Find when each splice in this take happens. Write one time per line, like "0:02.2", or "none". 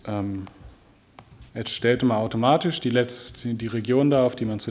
0:01.5